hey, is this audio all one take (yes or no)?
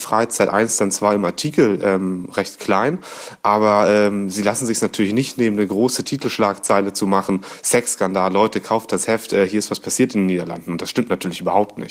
yes